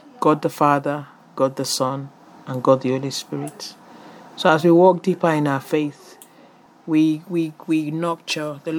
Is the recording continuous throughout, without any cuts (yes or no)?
yes